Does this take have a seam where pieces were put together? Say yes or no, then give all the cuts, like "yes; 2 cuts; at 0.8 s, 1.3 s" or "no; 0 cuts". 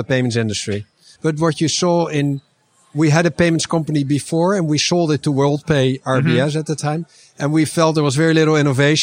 yes; 1 cut; at 1.2 s